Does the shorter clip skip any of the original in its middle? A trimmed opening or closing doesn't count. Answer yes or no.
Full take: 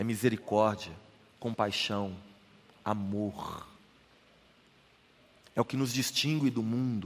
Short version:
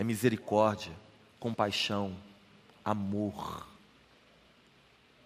no